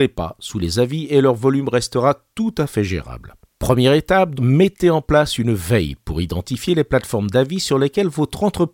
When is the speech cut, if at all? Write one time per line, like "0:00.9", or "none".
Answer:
0:04.4